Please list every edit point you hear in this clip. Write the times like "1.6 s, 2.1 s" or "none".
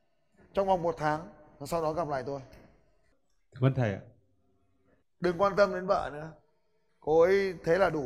6.9 s